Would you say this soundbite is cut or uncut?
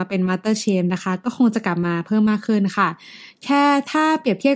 uncut